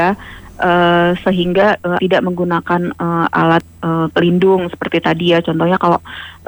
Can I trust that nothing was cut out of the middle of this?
no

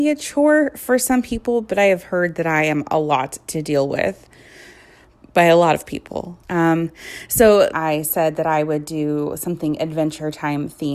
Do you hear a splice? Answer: yes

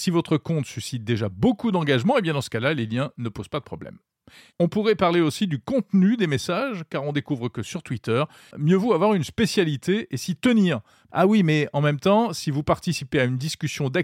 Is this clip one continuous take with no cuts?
no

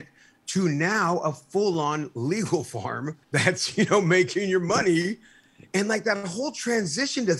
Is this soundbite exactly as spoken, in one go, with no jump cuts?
no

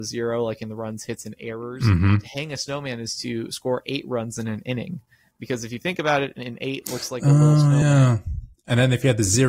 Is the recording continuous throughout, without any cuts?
yes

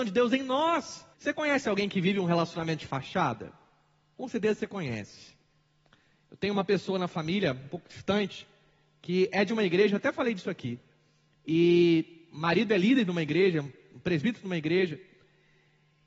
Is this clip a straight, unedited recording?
no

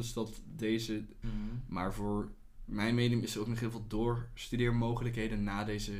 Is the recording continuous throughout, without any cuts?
no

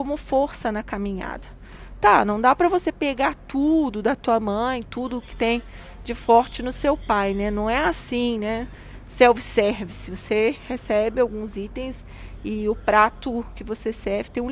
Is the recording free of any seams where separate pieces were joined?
yes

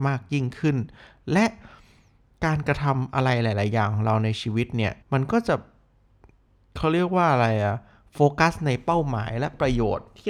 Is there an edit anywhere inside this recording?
yes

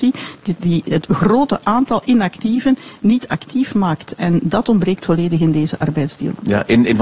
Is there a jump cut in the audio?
no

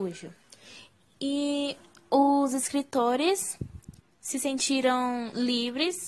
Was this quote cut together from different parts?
no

